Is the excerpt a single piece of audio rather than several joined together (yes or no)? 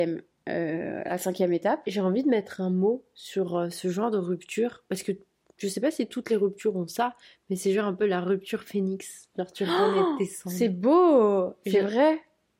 yes